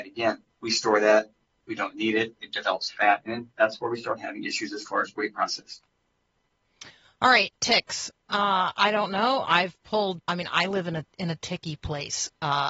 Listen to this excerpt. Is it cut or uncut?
cut